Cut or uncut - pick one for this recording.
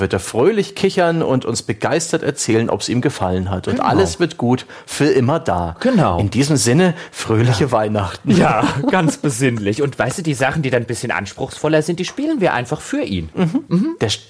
uncut